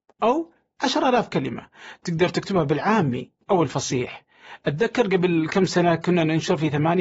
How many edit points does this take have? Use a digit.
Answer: 1